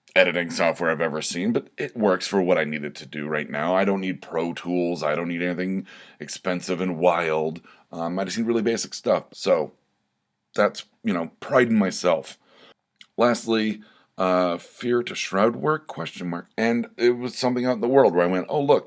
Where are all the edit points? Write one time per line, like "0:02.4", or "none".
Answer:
0:09.3
0:16.5